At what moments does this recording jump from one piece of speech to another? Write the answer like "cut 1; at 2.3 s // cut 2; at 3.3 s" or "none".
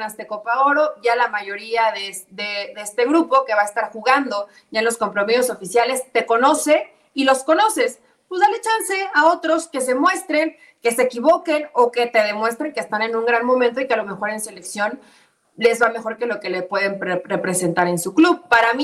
none